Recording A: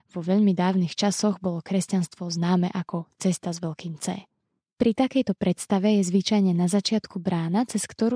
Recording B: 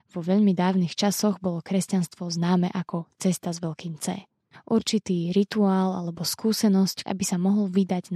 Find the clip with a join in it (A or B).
B